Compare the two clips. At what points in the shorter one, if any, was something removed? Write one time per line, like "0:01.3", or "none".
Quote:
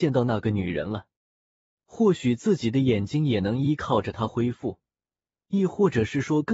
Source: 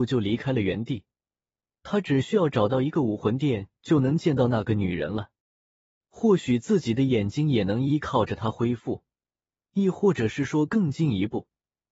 none